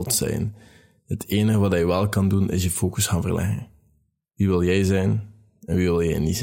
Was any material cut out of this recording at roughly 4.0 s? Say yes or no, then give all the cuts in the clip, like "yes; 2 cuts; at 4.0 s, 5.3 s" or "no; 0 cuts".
no; 0 cuts